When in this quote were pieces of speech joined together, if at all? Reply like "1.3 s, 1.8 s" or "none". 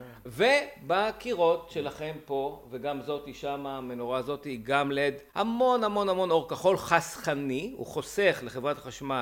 5.3 s